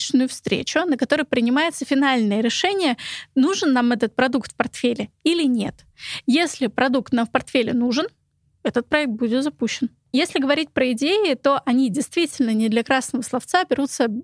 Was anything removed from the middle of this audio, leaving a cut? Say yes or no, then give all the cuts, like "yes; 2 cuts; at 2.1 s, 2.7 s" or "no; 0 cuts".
no; 0 cuts